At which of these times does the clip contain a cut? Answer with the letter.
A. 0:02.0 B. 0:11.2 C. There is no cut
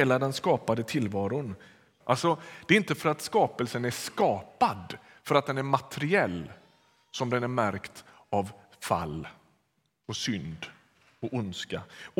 A